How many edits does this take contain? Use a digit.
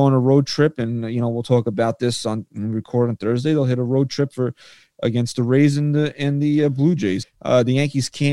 1